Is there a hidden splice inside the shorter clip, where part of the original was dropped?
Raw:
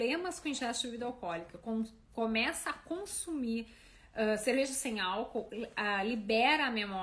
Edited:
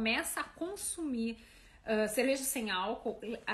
no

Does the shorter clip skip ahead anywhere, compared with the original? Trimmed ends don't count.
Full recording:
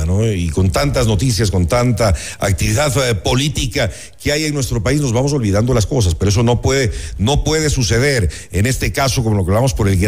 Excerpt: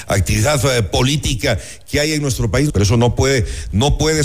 yes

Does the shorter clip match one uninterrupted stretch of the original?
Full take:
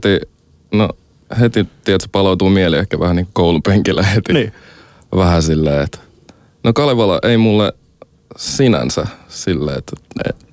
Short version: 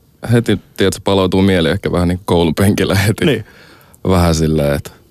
yes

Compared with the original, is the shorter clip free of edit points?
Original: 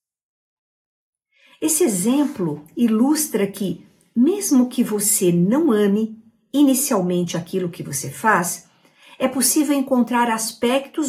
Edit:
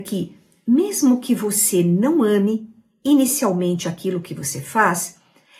yes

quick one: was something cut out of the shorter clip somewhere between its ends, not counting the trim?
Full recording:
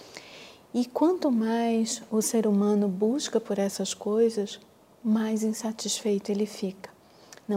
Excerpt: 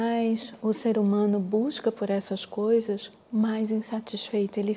yes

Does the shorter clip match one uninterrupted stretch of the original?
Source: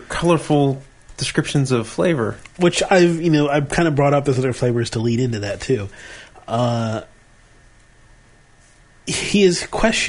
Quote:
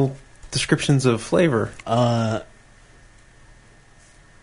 no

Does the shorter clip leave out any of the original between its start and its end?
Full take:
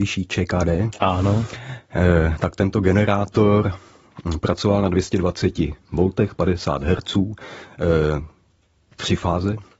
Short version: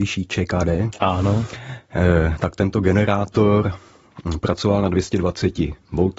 no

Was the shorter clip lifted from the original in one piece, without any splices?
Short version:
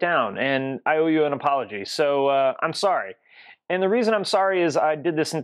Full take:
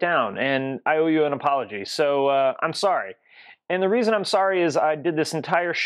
yes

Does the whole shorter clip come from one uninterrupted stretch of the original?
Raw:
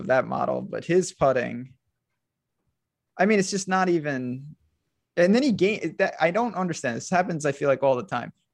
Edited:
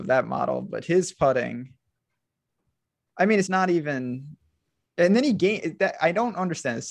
no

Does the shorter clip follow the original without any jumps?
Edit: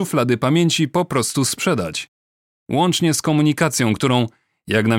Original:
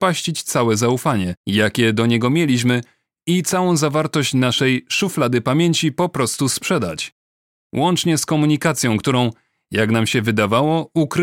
yes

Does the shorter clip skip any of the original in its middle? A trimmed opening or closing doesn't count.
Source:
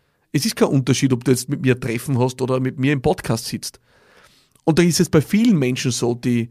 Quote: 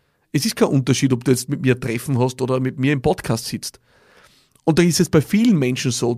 no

